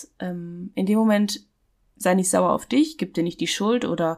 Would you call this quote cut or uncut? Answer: uncut